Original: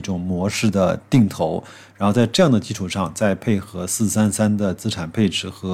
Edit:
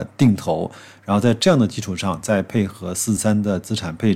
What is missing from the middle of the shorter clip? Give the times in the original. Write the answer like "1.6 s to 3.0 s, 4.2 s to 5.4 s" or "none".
4.1 s to 4.3 s